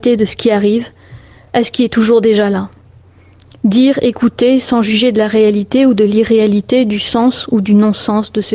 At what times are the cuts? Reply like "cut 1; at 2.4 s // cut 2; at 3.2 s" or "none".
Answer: none